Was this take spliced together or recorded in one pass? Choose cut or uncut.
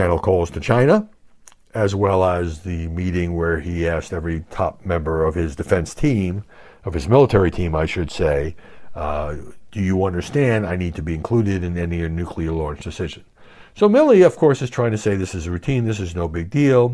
uncut